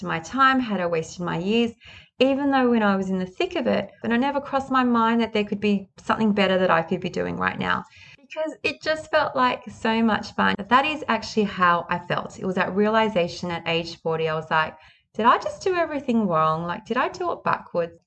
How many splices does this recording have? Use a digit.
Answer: 2